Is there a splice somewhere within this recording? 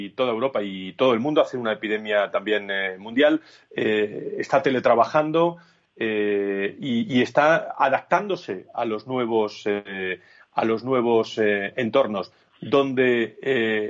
no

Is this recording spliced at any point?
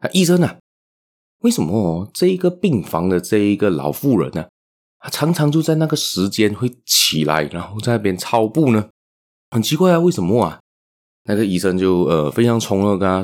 no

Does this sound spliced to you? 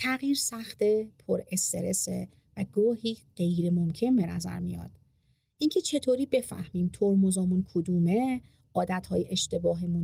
no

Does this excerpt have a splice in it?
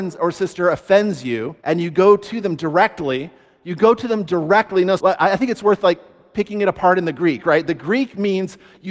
yes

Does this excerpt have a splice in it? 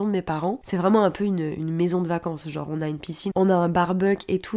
yes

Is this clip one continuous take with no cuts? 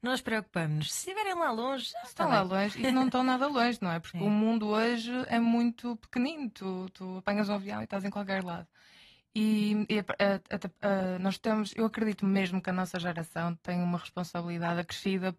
yes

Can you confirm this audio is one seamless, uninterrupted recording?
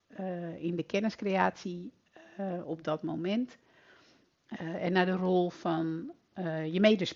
yes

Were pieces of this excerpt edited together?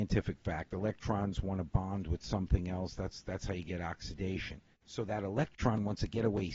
yes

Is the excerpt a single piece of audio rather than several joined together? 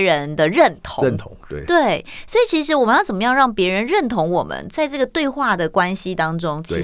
yes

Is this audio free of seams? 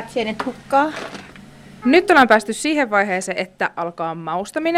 no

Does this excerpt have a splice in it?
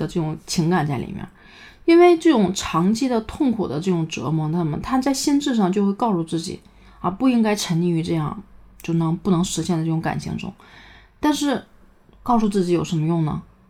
no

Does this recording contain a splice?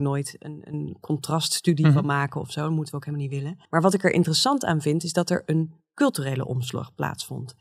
yes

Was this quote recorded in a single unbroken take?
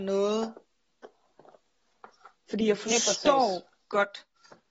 no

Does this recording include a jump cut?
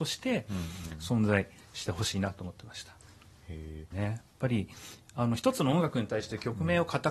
yes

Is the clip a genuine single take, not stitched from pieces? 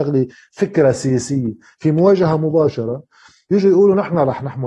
yes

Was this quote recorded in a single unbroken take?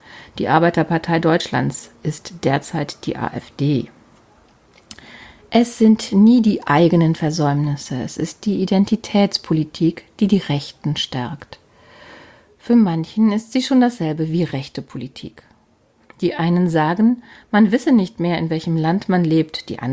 yes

